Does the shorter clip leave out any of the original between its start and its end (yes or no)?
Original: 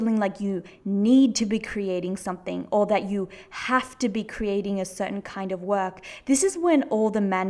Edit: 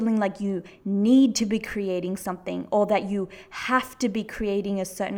no